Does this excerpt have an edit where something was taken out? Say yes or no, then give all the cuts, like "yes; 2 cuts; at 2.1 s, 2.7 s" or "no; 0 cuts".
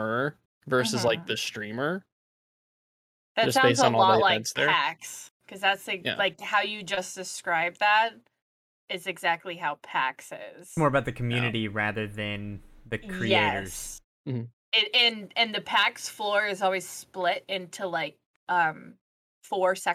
no; 0 cuts